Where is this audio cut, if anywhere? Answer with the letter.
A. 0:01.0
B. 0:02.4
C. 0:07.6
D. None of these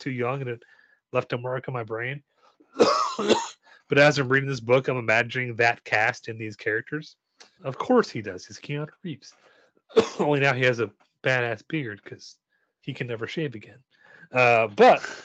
C